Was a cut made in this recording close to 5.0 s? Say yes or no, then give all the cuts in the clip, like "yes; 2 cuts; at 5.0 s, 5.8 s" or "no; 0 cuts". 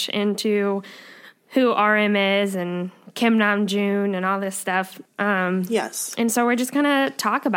yes; 1 cut; at 5.0 s